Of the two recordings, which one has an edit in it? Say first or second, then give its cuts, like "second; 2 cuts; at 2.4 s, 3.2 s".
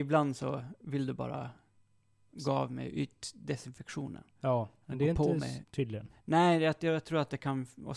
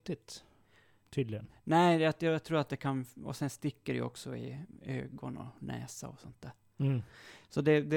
first; 1 cut; at 5.6 s